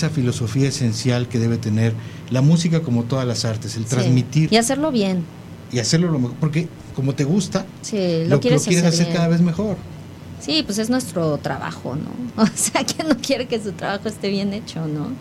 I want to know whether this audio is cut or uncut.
cut